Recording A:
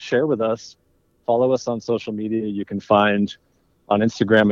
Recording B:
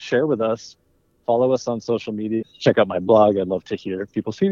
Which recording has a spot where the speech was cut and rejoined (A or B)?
B